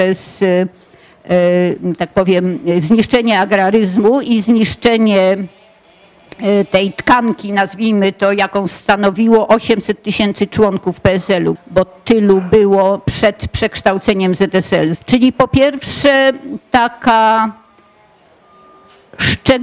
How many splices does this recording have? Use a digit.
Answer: 2